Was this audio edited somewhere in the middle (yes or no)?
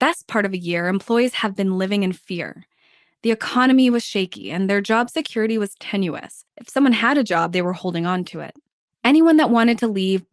yes